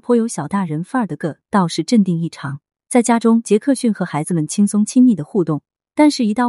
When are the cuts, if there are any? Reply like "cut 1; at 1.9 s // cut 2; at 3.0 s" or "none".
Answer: cut 1; at 1.2 s